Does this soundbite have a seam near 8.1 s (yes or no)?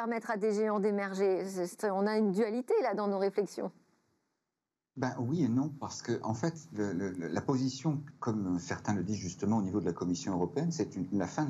yes